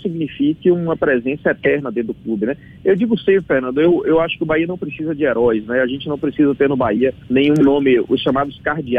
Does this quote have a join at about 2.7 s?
no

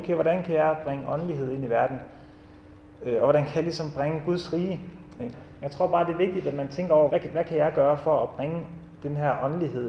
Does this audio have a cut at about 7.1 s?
yes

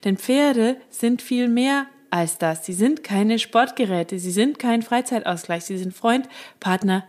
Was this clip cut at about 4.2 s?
no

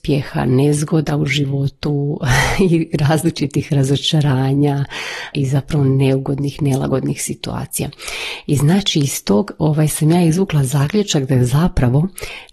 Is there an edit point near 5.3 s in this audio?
yes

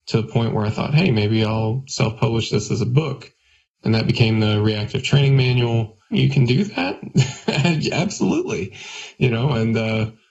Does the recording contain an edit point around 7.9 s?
no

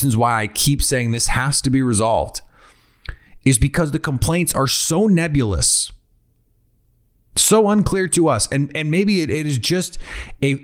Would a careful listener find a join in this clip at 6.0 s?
no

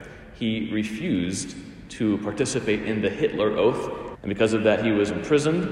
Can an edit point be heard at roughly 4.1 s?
yes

